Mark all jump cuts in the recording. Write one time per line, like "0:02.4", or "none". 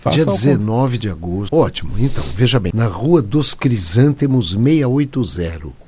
0:01.5
0:02.7